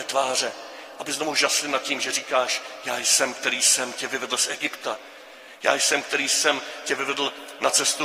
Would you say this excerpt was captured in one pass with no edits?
yes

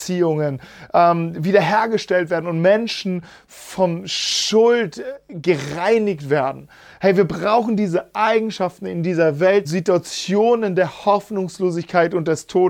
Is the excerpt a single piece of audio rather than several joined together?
no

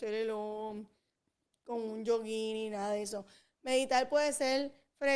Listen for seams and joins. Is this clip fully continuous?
yes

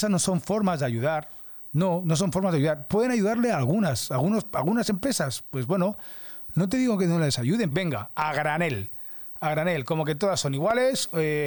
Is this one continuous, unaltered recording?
no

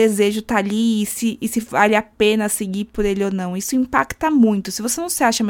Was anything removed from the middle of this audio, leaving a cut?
no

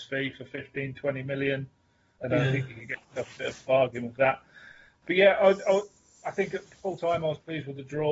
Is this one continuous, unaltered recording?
yes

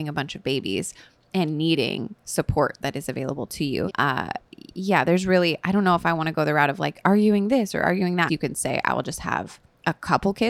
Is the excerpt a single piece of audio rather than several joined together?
no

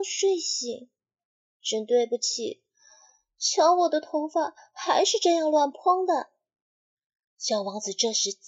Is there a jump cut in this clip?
yes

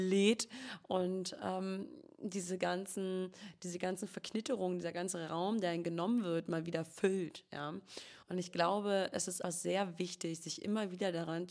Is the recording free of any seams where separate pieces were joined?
no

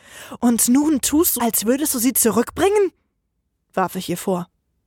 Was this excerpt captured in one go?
no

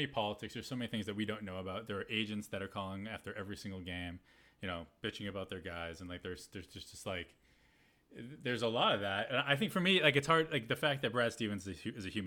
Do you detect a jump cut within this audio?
no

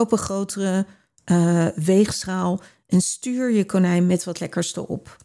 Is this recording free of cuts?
yes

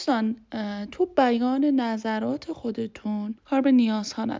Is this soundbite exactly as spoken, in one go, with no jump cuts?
no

